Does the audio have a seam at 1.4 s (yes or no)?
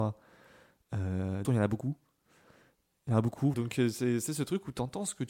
yes